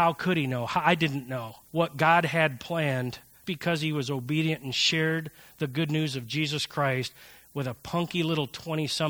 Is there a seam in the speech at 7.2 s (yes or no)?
no